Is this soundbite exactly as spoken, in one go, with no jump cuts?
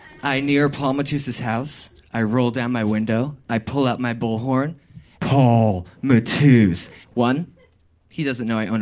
no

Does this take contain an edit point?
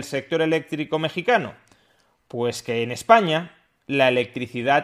no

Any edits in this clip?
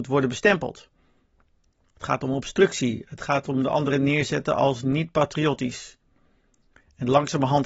no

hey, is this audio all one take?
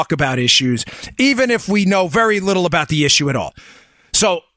yes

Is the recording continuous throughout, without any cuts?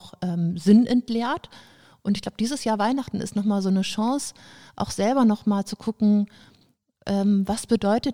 yes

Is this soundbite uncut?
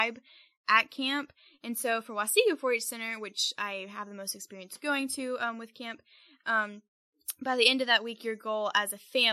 yes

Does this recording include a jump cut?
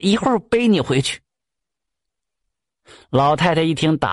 no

